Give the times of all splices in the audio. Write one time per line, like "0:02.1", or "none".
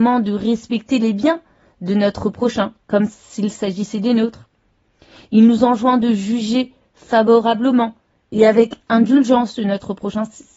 none